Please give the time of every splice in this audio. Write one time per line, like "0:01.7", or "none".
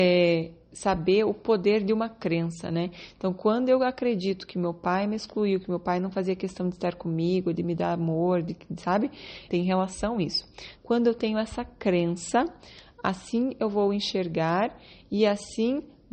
0:09.5
0:10.8